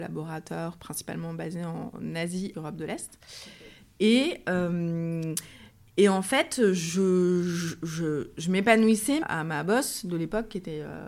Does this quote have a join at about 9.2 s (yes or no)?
yes